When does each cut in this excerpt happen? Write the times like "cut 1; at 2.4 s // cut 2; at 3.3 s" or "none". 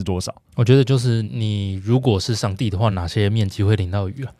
cut 1; at 1.2 s // cut 2; at 2.9 s

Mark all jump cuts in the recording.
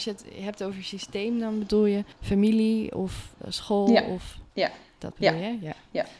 cut 1; at 2.1 s

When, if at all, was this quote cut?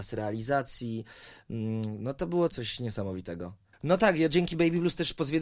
cut 1; at 2.5 s // cut 2; at 3.7 s

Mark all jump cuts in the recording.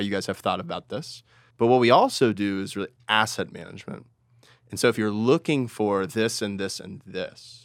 cut 1; at 1.5 s

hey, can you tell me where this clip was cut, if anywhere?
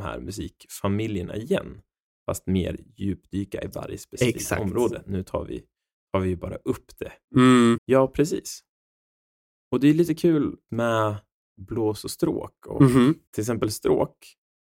cut 1; at 7.8 s // cut 2; at 10.7 s // cut 3; at 13.3 s

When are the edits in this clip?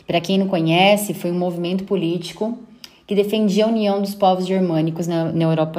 none

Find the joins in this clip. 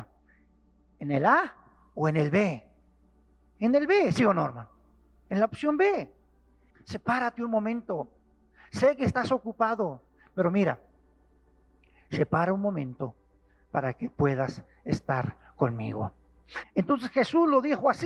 cut 1; at 6.7 s // cut 2; at 16.6 s

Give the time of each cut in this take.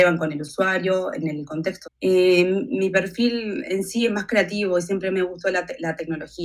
cut 1; at 1.8 s

